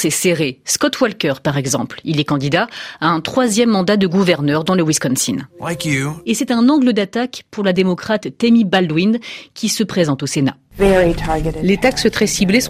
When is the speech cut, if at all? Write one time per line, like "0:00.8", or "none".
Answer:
0:06.2